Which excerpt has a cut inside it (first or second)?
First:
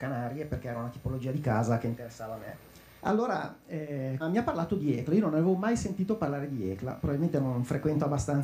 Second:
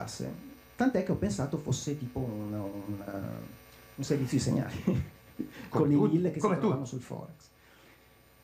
first